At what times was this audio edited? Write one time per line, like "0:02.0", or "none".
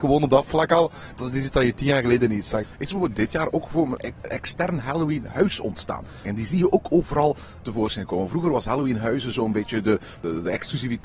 0:02.6
0:06.2